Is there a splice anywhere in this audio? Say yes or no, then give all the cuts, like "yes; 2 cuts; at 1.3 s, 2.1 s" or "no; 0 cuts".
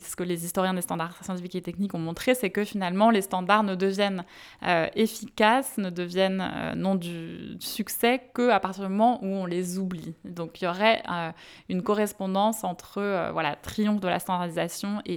no; 0 cuts